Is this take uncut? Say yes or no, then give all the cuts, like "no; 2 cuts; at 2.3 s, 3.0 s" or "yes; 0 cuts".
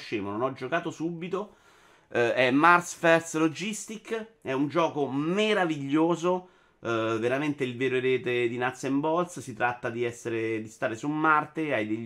yes; 0 cuts